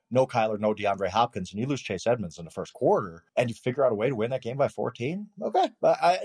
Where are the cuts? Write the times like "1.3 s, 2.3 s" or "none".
3.3 s